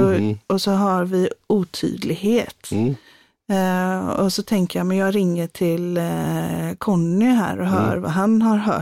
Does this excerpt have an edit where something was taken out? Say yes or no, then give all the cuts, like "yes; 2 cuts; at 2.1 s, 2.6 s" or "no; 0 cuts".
no; 0 cuts